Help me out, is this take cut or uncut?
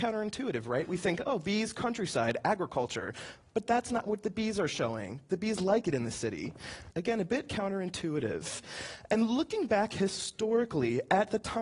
cut